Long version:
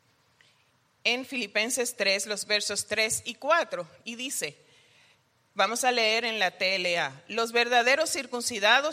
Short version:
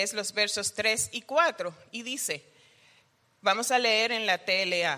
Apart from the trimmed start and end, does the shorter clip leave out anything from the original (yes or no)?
no